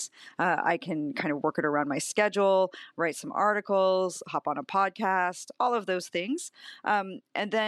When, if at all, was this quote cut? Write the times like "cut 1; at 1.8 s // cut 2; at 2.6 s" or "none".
none

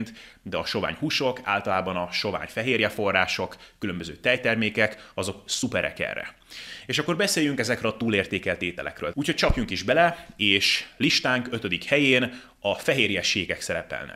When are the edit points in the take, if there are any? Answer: cut 1; at 9.1 s

